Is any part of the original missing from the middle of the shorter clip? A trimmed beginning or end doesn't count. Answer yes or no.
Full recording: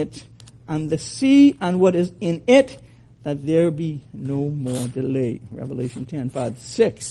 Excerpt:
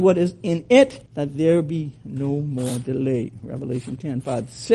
yes